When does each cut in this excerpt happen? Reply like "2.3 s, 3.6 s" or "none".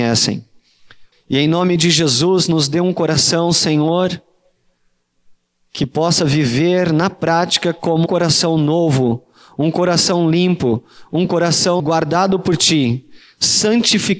1.1 s, 8.1 s, 11.8 s